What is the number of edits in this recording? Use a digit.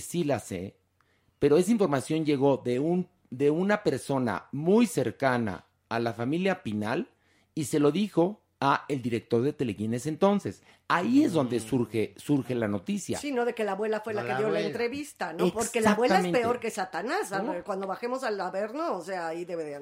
0